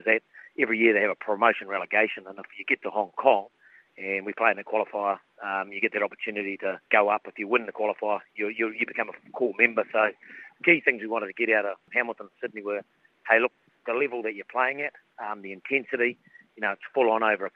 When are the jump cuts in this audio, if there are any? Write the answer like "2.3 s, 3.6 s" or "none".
none